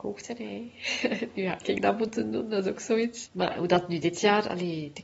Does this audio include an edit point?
yes; 1 cut; at 3.3 s

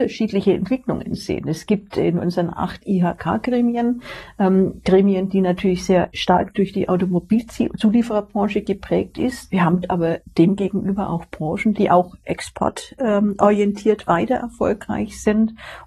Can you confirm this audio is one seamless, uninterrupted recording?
no; 2 cuts; at 9.5 s, 11.7 s

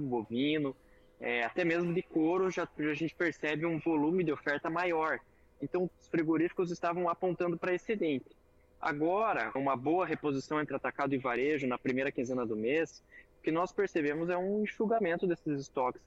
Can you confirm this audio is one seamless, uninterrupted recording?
no; 2 cuts; at 5.9 s, 9.6 s

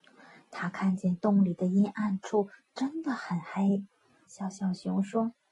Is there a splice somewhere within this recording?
yes; 1 cut; at 4.2 s

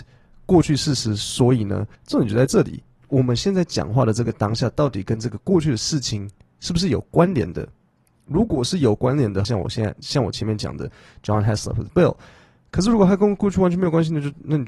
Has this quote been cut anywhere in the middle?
yes; 2 cuts; at 2.0 s, 9.4 s

